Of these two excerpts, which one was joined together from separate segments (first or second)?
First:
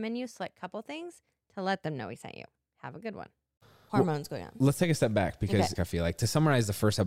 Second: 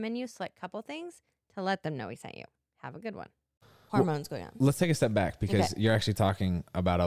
first